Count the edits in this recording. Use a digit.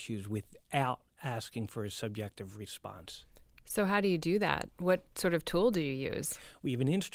0